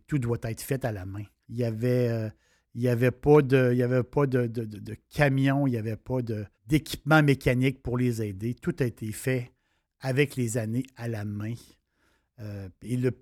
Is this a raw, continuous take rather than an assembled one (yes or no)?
no